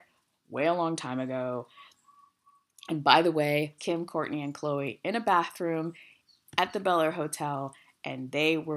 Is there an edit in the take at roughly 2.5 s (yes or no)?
no